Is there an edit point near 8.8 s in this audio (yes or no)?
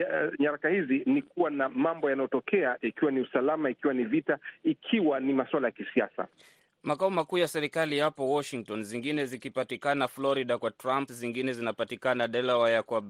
no